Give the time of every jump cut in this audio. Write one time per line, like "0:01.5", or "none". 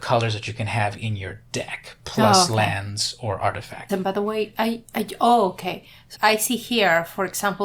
0:03.9
0:06.2

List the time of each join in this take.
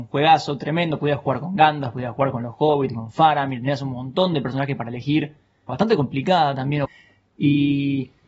0:05.7
0:06.9

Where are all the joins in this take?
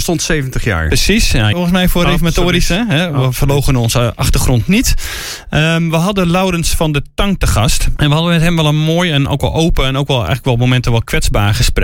0:01.5
0:08.0

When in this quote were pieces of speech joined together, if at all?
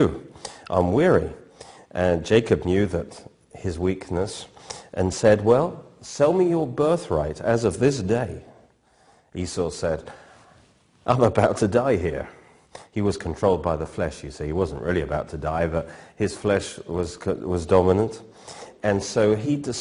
none

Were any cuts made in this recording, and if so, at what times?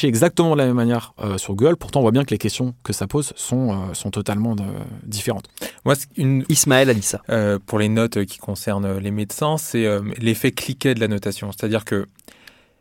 0:06.5

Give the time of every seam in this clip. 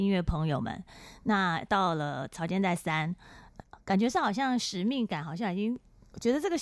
none

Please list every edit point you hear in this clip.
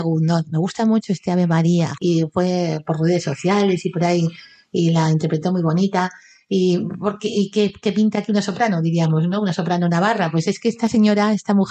0:02.0

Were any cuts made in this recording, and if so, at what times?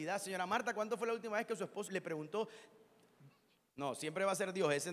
0:01.9
0:03.7

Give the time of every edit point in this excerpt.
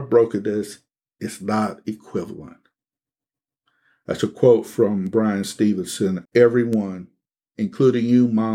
0:06.3

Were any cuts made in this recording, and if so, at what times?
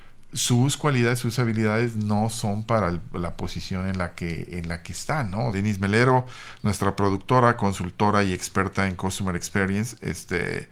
0:05.5

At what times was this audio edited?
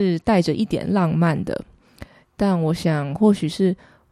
0:02.3

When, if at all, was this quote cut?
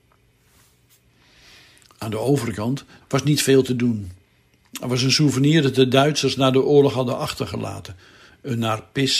0:03.0

